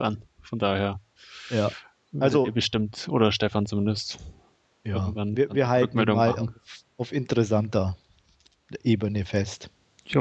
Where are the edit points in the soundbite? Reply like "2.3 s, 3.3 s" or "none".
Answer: none